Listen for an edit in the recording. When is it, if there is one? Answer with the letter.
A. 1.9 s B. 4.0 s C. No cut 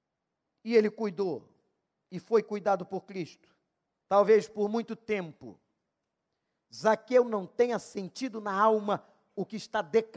B